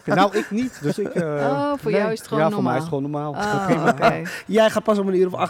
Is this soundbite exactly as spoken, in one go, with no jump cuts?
yes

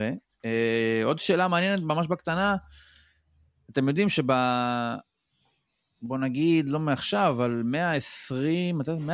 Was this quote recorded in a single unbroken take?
yes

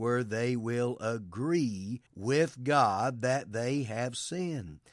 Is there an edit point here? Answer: yes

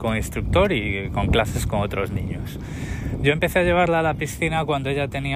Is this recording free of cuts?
yes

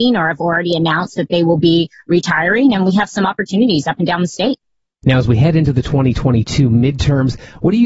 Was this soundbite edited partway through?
no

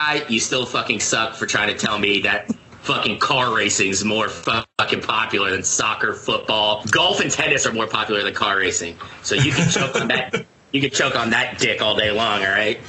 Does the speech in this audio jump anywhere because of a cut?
yes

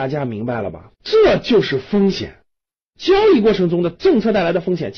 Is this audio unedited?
no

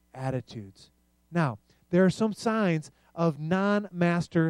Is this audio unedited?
yes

